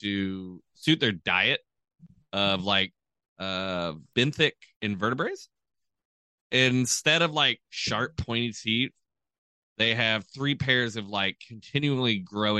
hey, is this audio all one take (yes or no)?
yes